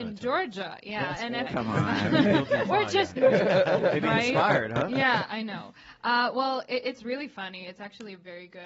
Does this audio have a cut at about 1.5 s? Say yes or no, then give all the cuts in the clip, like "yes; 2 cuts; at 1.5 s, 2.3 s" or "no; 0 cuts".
yes; 2 cuts; at 1.5 s, 3.2 s